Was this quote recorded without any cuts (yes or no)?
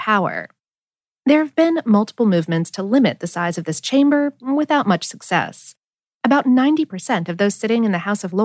yes